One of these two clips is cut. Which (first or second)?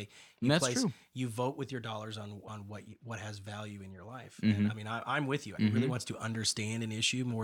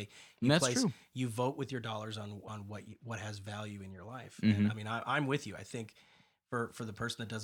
first